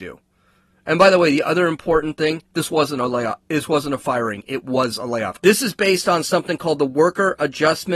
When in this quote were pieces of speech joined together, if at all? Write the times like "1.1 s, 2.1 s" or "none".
5.4 s